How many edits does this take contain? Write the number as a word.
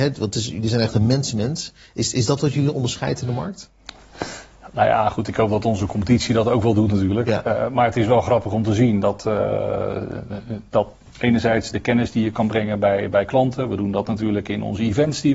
one